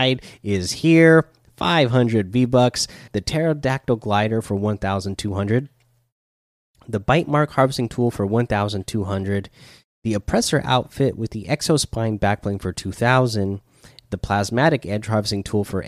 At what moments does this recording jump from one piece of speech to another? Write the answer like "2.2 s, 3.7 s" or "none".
3.1 s